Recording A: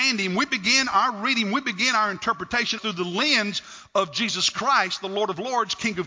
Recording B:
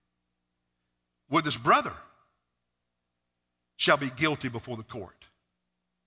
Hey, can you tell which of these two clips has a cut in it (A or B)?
A